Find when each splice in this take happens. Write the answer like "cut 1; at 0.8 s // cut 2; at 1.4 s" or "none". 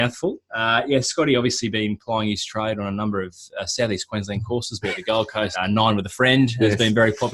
cut 1; at 5.5 s